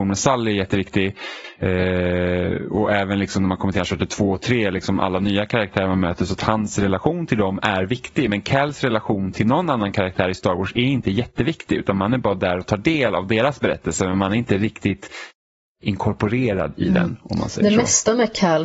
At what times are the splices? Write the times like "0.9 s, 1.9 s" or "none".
none